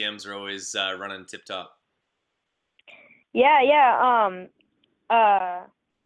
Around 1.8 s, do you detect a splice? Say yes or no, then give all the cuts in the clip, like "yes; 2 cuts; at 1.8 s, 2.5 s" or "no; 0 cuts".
no; 0 cuts